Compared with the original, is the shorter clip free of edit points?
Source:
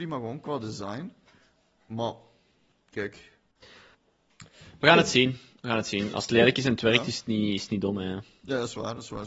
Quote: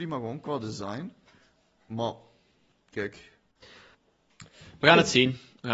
yes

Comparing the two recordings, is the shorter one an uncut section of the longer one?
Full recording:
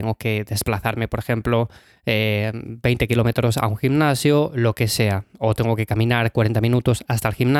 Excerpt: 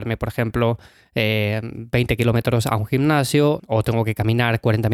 no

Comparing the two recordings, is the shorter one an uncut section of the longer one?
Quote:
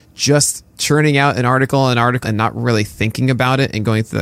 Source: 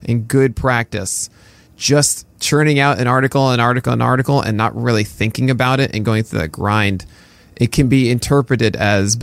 no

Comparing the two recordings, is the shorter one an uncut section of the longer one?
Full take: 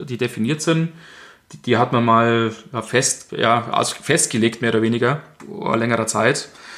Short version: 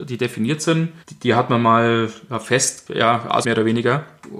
no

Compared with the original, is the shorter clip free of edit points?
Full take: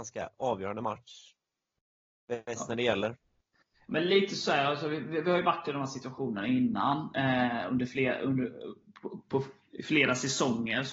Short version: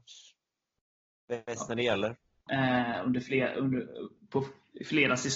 no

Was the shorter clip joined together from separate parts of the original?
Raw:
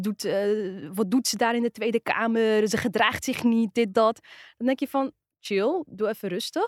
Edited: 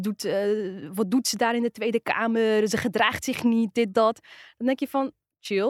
no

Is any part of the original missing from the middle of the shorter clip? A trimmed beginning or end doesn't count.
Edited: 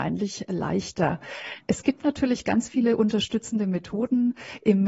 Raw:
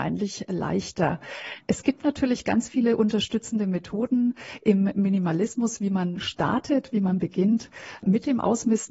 no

